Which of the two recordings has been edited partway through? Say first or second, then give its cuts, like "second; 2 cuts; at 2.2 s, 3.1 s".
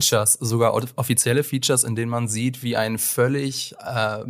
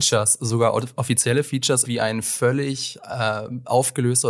second; 1 cut; at 1.8 s